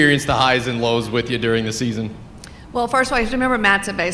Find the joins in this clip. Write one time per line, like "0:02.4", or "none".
none